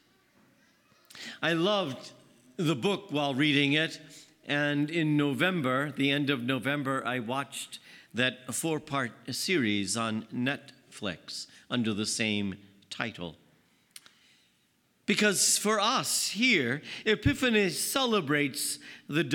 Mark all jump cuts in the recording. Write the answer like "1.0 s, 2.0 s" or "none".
none